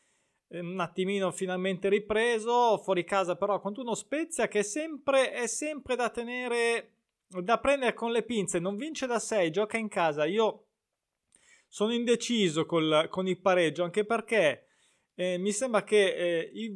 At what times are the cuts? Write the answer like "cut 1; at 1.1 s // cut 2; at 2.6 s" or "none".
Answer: none